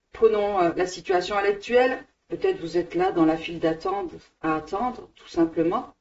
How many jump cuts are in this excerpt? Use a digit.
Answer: 1